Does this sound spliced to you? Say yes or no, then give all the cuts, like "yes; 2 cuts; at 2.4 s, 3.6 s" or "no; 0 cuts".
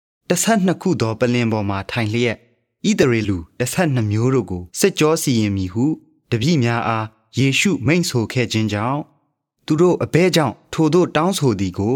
yes; 2 cuts; at 3.2 s, 4.7 s